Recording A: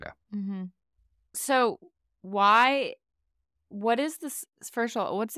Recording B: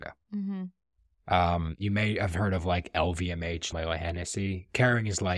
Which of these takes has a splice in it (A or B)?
B